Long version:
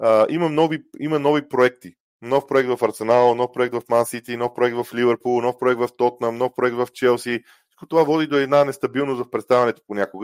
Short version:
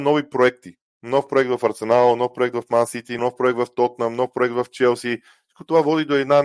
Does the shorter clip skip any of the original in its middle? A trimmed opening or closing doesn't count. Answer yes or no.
yes